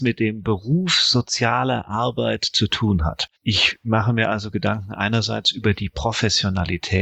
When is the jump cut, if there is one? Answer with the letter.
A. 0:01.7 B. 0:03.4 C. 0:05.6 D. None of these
B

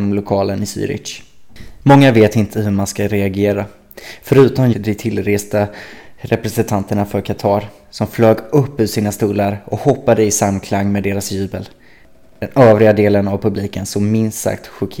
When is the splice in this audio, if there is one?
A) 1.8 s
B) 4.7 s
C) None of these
B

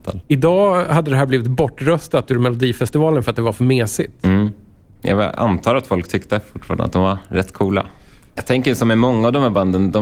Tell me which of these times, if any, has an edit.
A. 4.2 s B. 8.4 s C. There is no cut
B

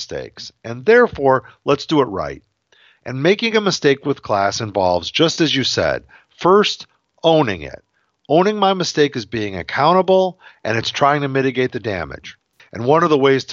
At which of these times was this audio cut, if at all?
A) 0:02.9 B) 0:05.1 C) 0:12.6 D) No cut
C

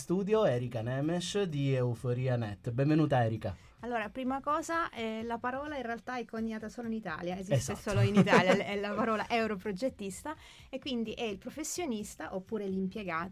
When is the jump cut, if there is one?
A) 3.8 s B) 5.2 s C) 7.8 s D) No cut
A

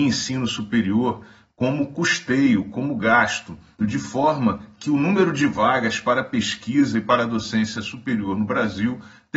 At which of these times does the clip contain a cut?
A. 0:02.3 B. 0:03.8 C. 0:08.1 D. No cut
B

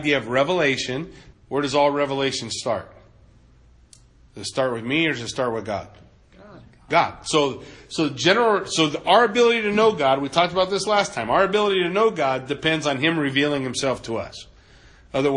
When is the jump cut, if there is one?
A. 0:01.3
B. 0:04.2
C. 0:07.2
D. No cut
A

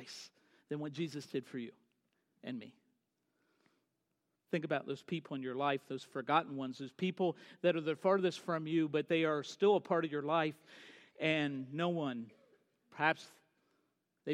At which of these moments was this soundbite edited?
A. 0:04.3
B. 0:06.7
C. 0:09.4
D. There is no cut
A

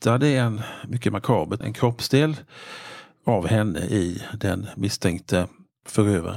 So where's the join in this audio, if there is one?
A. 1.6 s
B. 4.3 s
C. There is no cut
A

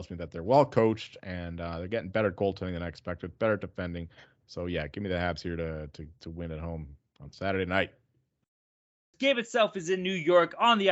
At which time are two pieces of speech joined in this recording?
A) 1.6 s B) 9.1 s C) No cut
B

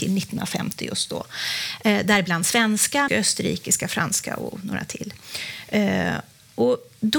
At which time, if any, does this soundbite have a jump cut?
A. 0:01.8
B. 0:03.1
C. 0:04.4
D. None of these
B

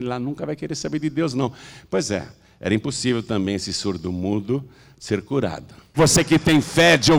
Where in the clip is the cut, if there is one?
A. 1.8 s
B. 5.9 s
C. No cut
B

